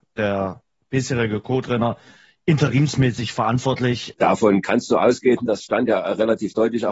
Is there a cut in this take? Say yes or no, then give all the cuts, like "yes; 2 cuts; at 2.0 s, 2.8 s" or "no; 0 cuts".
yes; 1 cut; at 4.1 s